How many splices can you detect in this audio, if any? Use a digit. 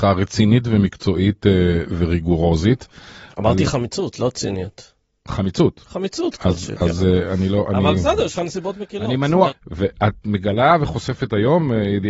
1